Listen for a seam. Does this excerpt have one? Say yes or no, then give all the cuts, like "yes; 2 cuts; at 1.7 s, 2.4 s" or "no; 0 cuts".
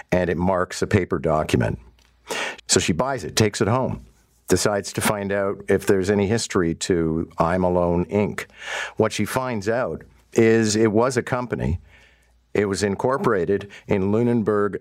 yes; 1 cut; at 2.6 s